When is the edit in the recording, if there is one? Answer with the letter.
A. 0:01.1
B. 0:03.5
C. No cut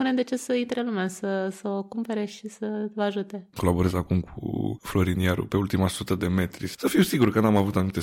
B